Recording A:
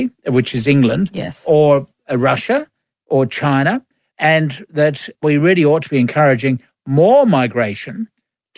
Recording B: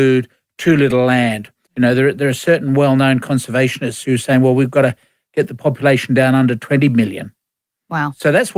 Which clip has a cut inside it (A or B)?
B